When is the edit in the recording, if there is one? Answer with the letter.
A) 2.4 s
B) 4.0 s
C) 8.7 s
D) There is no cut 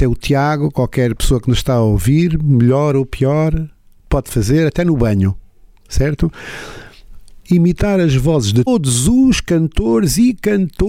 C